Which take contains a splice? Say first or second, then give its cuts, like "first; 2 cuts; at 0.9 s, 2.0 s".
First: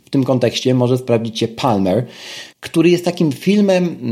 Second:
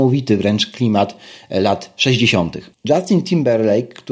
second; 1 cut; at 2.7 s